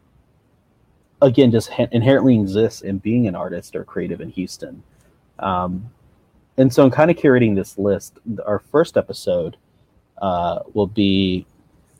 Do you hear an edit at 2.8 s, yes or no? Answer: yes